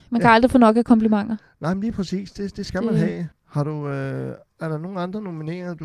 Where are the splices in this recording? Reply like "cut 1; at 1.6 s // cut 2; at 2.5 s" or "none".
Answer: cut 1; at 3.3 s